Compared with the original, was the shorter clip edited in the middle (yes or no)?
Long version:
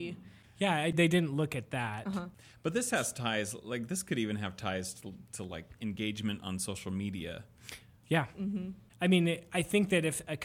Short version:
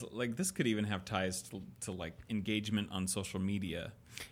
no